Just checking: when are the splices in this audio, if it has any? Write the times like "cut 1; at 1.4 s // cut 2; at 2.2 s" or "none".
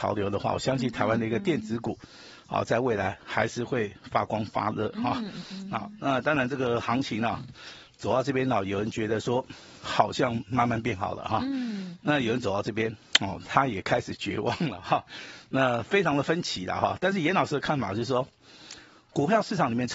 none